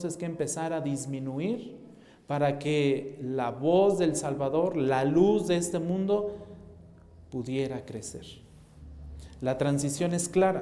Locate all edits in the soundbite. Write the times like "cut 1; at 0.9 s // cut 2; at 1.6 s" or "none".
none